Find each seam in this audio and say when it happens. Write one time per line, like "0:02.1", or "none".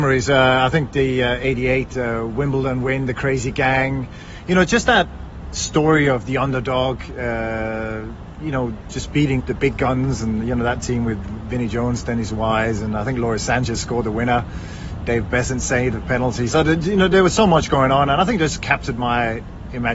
0:09.4